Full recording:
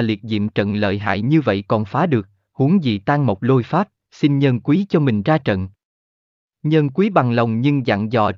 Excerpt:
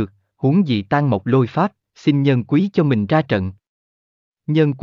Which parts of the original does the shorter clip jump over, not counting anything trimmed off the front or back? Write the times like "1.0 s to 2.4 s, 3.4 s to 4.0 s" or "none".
none